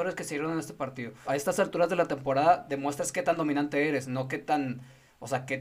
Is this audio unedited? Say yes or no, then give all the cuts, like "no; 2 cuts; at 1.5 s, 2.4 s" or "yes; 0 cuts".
no; 1 cut; at 1.2 s